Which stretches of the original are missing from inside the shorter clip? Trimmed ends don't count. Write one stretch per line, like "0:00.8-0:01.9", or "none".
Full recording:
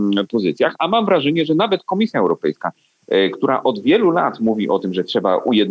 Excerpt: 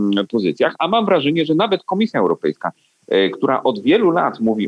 none